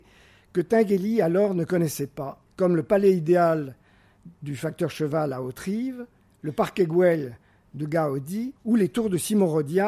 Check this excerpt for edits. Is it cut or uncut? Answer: cut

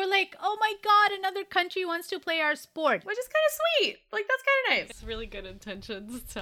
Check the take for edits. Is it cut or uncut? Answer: cut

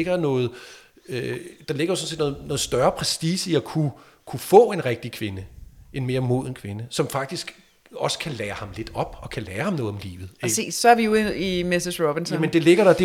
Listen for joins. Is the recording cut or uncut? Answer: uncut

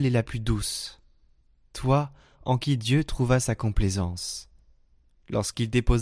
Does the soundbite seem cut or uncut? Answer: uncut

